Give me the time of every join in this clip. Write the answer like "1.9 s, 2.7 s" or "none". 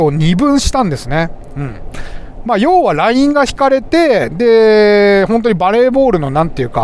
none